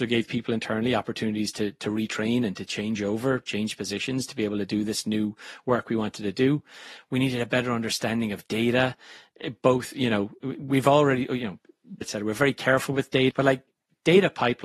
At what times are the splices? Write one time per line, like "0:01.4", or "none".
0:12.0
0:13.3